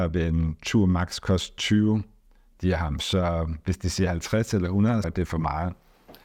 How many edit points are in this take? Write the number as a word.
one